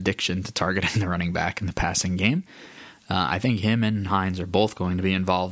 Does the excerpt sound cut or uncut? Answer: uncut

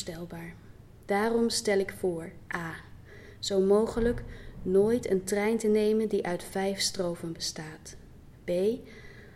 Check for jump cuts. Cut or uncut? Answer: uncut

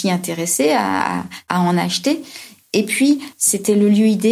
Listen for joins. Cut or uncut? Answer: cut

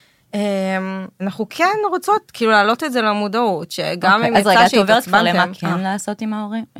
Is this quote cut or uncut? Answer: cut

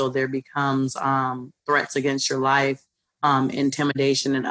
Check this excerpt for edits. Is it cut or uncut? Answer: uncut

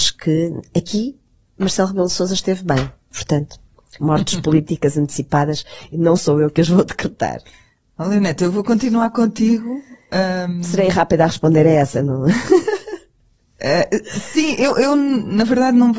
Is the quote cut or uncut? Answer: cut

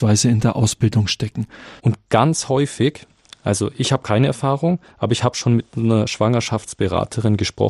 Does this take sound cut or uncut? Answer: cut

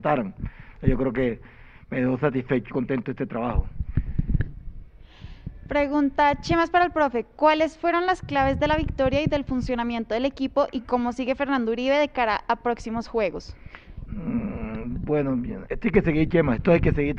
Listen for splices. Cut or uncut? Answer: cut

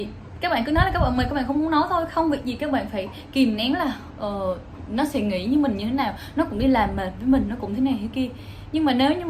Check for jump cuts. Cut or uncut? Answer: uncut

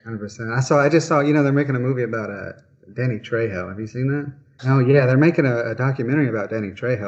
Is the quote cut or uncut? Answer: cut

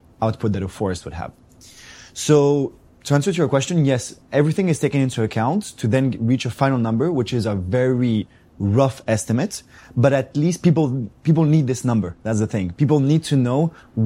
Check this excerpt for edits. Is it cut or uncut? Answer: uncut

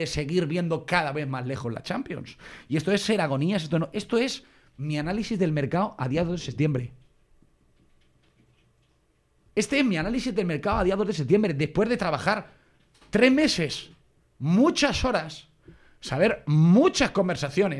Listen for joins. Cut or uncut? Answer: uncut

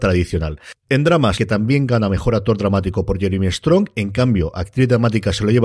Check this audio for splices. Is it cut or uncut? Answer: cut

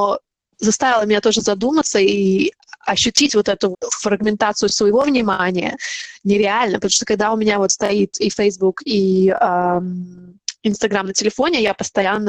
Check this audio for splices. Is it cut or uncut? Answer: cut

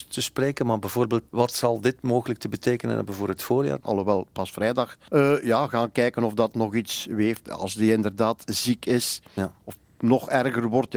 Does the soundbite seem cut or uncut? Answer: cut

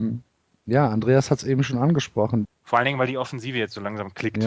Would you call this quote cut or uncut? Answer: cut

